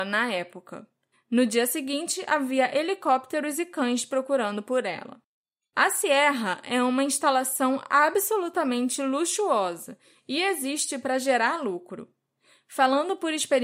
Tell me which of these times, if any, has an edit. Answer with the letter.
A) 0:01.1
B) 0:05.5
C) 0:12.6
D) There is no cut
A